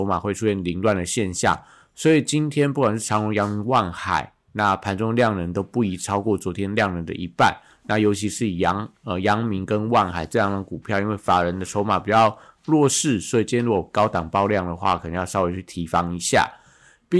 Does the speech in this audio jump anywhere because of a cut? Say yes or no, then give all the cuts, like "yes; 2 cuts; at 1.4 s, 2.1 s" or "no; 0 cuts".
no; 0 cuts